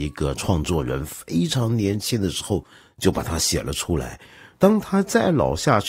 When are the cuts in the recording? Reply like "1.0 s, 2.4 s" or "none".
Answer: 4.5 s

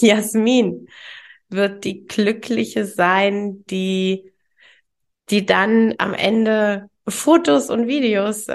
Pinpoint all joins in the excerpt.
5.9 s

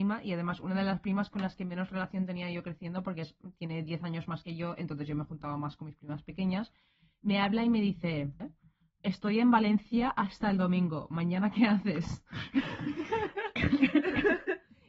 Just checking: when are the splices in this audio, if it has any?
8.4 s

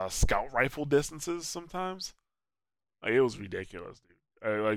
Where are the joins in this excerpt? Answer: none

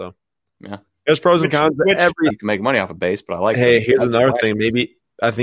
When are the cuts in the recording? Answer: 2.3 s

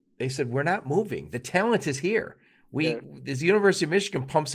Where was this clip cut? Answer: none

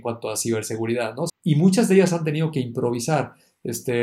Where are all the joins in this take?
1.3 s

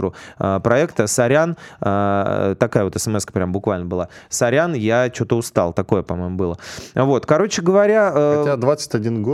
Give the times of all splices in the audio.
none

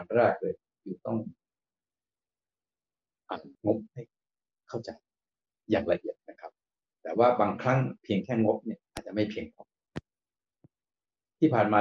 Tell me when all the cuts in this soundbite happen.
3.5 s, 6.2 s, 8.9 s

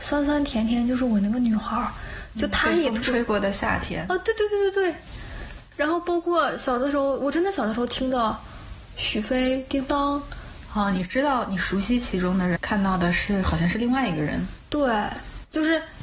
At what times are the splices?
10.7 s, 12.6 s

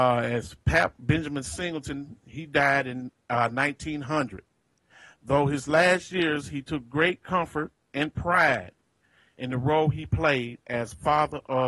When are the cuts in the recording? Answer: none

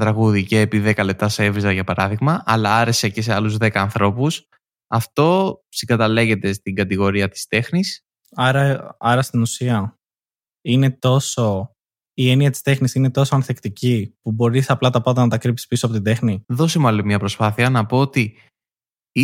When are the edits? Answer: 16.4 s

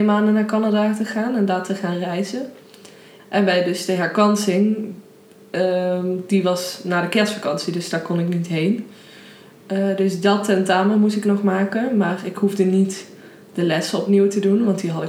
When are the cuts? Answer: 3.2 s

